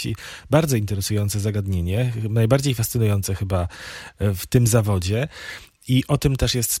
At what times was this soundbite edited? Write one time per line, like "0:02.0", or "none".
none